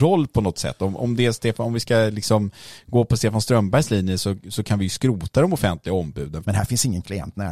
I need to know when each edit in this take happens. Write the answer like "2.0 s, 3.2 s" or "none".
6.4 s